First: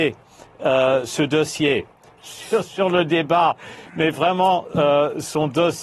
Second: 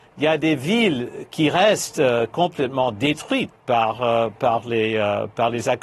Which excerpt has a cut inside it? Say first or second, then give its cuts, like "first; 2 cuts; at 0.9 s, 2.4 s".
first; 1 cut; at 2.2 s